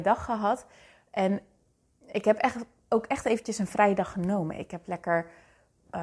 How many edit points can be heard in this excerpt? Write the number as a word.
zero